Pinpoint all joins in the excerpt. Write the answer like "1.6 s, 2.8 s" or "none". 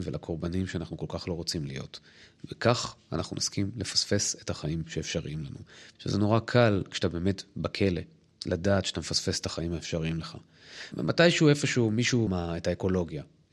6.0 s, 10.9 s, 12.3 s